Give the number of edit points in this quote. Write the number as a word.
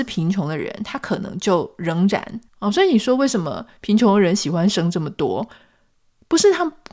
one